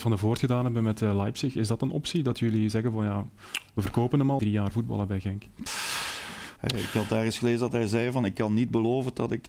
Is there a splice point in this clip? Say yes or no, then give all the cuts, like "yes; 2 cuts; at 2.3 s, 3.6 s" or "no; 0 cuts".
yes; 2 cuts; at 4.4 s, 6.6 s